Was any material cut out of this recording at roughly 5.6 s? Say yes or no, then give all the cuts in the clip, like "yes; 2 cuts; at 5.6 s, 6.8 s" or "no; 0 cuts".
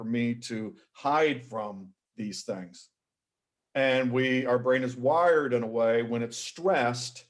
no; 1 cut; at 3.6 s